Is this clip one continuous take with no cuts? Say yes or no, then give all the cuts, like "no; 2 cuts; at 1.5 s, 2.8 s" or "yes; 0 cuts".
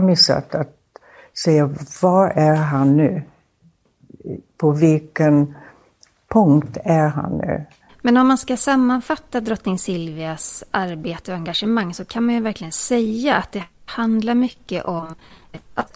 no; 1 cut; at 7.9 s